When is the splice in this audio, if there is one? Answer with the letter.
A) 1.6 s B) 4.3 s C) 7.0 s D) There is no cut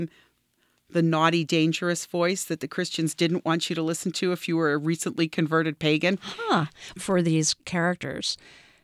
C